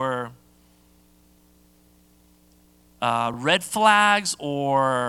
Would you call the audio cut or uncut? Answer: uncut